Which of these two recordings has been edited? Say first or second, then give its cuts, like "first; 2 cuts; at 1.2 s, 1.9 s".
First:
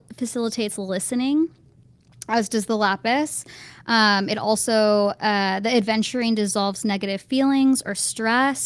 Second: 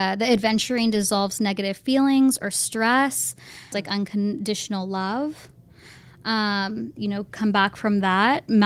second; 2 cuts; at 3.7 s, 7.0 s